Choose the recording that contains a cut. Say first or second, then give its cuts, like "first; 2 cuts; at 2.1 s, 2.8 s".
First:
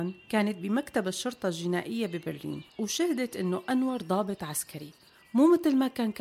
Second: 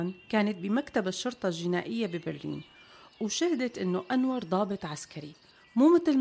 first; 1 cut; at 2.7 s